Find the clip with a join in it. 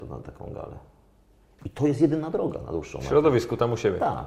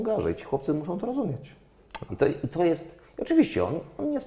second; 1 cut; at 2.1 s

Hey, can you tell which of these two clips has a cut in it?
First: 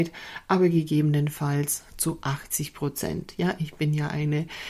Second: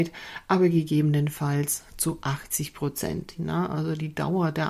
second; 1 cut; at 3.4 s

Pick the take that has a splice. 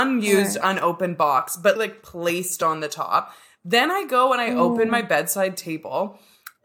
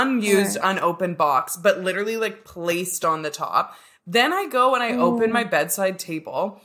first; 1 cut; at 1.8 s

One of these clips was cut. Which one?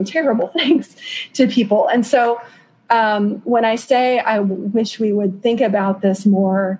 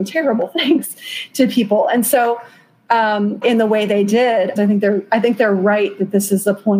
second; 2 cuts; at 3.4 s, 4.6 s

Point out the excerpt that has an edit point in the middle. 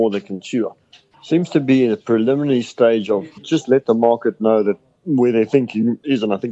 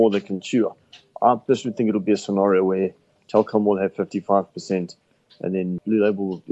first; 2 cuts; at 1.1 s, 3.4 s

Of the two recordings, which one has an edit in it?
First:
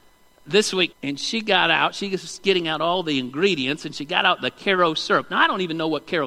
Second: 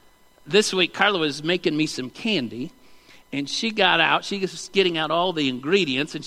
first; 1 cut; at 0.9 s

